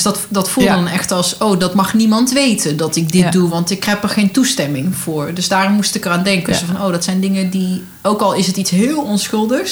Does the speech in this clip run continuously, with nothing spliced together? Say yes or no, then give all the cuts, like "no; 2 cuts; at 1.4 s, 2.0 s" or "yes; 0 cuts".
yes; 0 cuts